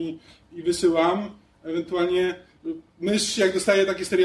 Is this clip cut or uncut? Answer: cut